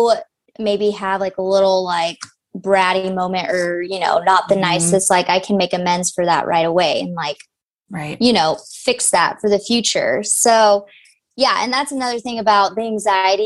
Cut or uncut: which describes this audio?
uncut